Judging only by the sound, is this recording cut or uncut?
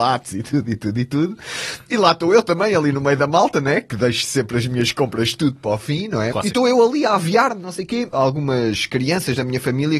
cut